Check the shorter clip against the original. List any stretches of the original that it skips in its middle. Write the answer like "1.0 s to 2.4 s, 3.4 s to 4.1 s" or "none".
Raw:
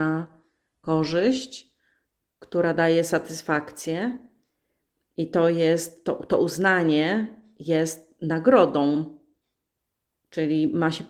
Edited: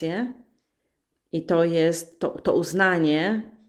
none